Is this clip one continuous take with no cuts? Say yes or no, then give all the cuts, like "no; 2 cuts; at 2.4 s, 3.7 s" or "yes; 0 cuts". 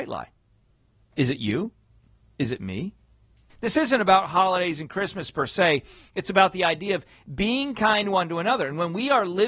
no; 1 cut; at 3.5 s